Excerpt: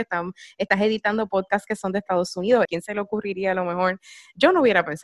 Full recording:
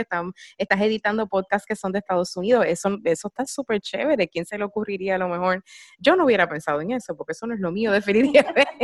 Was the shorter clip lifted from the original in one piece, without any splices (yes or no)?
no